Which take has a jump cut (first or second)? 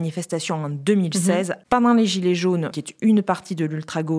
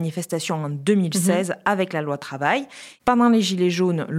first